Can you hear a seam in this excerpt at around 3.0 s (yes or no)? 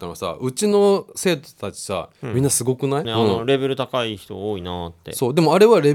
yes